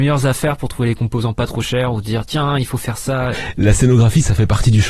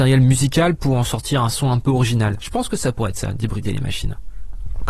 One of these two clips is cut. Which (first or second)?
first